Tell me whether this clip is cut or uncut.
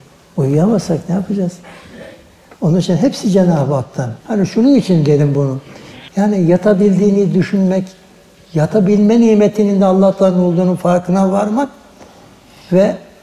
cut